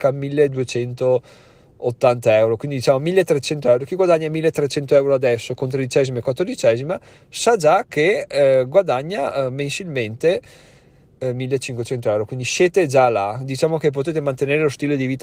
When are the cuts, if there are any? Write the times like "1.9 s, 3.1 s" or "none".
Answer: none